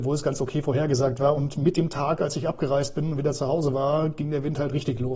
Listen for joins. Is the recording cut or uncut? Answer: uncut